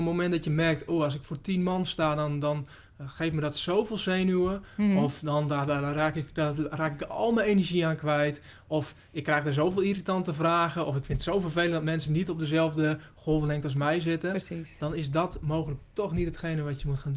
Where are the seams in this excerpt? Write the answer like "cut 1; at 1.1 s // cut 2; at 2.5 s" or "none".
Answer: none

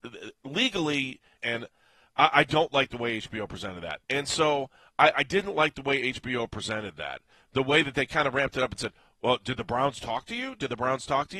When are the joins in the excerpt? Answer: cut 1; at 1.4 s // cut 2; at 4.0 s

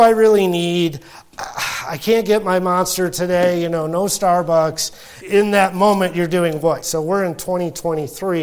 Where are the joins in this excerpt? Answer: cut 1; at 5.2 s // cut 2; at 6.8 s

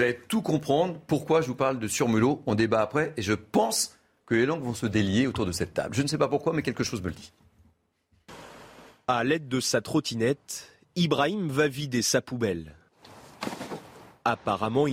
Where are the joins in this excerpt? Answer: none

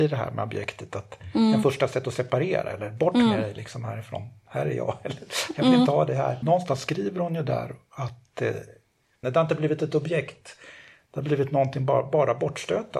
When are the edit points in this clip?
cut 1; at 6.4 s // cut 2; at 9.2 s

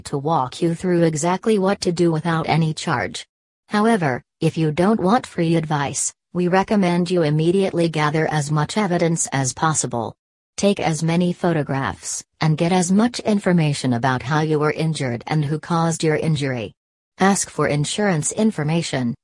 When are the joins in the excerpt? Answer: cut 1; at 12.3 s

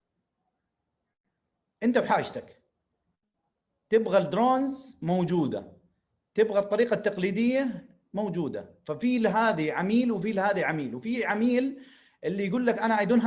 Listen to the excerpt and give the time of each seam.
none

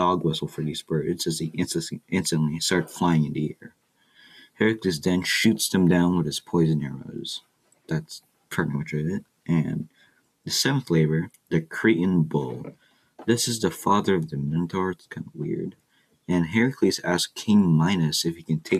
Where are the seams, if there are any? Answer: none

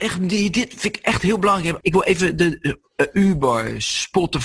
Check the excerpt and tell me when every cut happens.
cut 1; at 1.8 s

